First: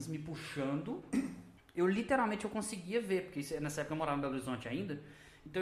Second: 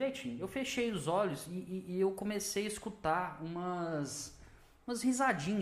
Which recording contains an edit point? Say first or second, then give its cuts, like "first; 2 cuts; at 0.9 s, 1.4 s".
first; 1 cut; at 1.6 s